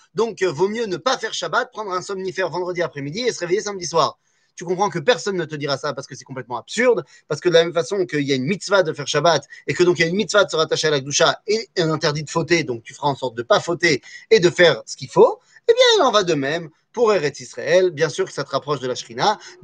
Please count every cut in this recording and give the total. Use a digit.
0